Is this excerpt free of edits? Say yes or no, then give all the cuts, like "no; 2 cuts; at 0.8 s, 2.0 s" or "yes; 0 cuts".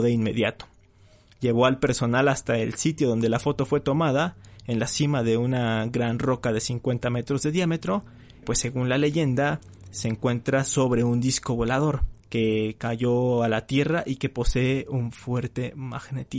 no; 2 cuts; at 8.4 s, 12.2 s